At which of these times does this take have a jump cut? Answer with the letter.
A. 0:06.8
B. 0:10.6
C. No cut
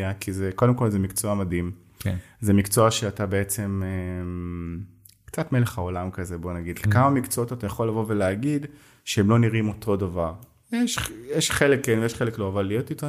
A